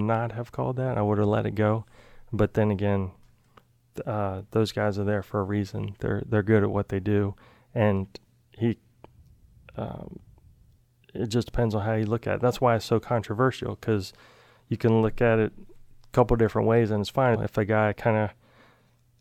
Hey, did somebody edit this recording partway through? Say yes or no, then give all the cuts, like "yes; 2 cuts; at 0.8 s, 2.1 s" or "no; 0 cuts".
yes; 1 cut; at 17.3 s